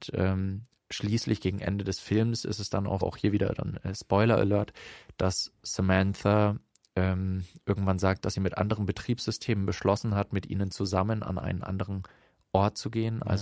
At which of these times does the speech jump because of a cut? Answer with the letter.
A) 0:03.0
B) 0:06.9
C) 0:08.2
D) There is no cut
A